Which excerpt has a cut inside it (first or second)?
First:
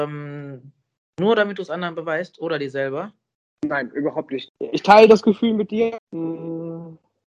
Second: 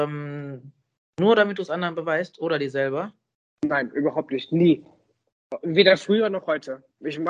first